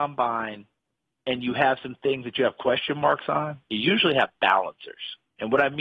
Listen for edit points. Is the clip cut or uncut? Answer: uncut